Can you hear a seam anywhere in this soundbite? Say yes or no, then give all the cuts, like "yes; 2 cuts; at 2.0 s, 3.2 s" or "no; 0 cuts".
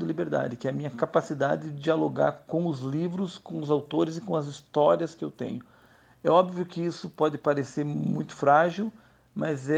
no; 0 cuts